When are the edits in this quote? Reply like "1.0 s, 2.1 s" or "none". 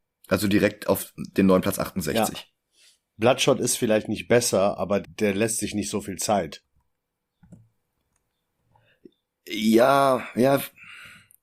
5.0 s